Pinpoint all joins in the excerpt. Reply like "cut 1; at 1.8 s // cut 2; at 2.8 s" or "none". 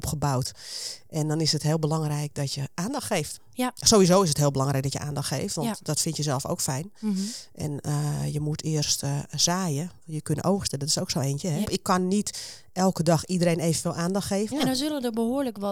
cut 1; at 11.6 s // cut 2; at 14.5 s